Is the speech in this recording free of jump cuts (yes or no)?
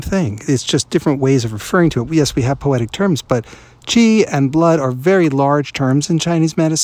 yes